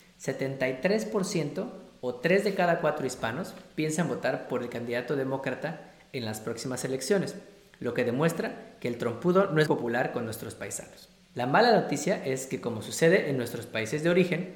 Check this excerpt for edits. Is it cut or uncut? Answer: cut